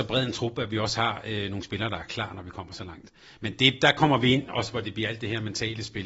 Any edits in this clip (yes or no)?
no